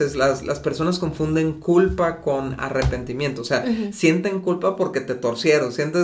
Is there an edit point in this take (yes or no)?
no